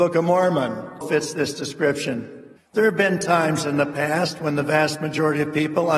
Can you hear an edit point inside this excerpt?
yes; 2 cuts; at 1.0 s, 2.6 s

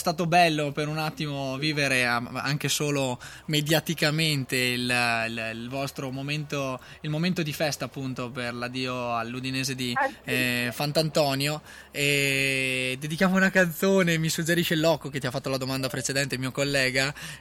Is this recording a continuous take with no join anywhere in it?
yes; 0 cuts

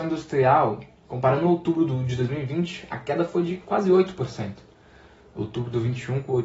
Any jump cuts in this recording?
no; 0 cuts

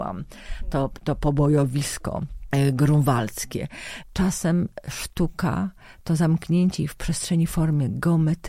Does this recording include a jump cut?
yes; 1 cut; at 4.0 s

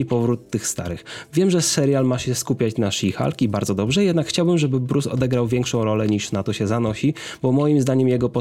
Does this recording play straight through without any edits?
yes; 0 cuts

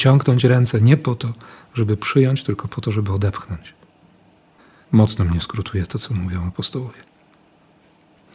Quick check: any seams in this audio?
no; 0 cuts

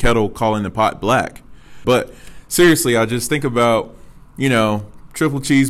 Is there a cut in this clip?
yes; 1 cut; at 1.8 s

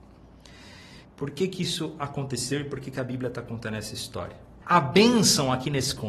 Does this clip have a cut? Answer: yes; 2 cuts; at 1.0 s, 4.6 s

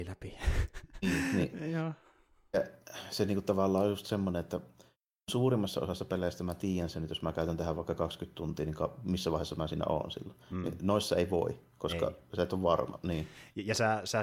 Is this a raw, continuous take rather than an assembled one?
yes; 0 cuts

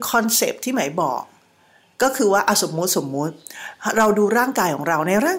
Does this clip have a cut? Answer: no; 0 cuts

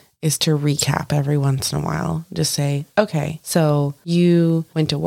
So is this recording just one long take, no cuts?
yes; 0 cuts

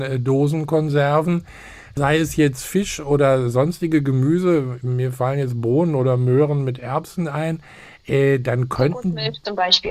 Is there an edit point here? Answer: no; 0 cuts

